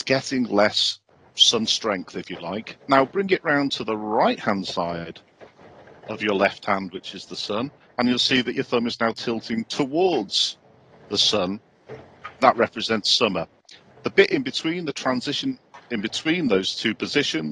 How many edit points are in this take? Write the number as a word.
one